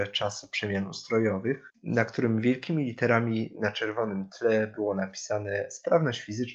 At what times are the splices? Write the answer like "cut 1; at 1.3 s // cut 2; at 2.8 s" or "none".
none